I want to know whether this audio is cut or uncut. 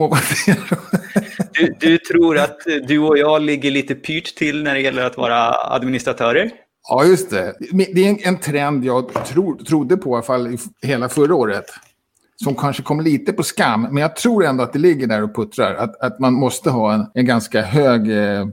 uncut